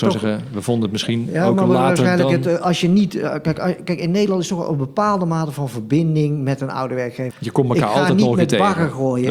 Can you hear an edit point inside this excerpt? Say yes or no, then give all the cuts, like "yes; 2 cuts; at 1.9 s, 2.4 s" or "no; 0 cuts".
yes; 1 cut; at 7.3 s